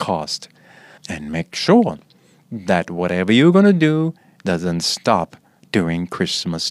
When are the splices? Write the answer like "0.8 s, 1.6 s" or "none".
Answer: 1.0 s